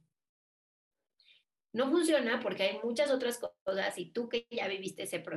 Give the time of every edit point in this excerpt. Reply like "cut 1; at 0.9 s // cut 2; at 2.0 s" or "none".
none